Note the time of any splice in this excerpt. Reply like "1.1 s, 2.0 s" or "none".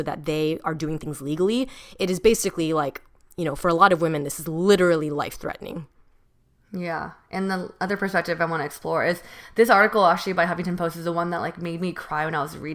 none